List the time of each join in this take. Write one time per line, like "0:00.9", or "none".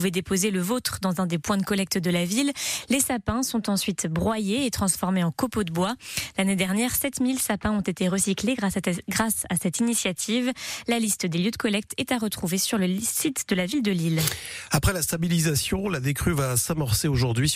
none